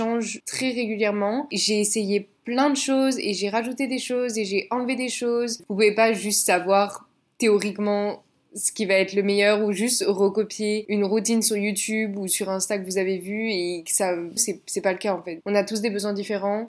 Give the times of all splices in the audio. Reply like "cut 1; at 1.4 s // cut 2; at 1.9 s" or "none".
cut 1; at 5.6 s // cut 2; at 14.4 s